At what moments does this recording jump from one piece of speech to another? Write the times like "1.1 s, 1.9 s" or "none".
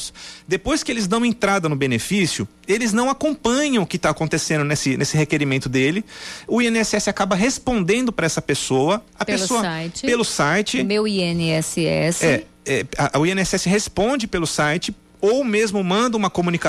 none